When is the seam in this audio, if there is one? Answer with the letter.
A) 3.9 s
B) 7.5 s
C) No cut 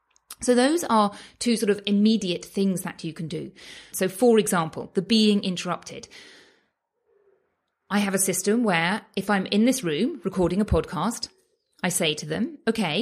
A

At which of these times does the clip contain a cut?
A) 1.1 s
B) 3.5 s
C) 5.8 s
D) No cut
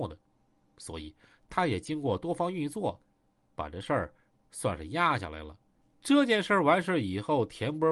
C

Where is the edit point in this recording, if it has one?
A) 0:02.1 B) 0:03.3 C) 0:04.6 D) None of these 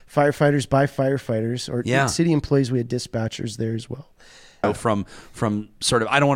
C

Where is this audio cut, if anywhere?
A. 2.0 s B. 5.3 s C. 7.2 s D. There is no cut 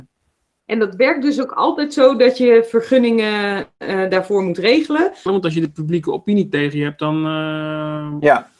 B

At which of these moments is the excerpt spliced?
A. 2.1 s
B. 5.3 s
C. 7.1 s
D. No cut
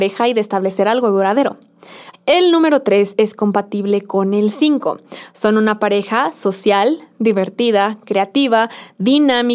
A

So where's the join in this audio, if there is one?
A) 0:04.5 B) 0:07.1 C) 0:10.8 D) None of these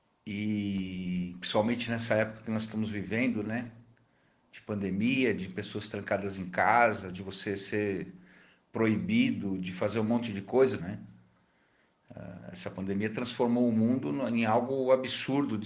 C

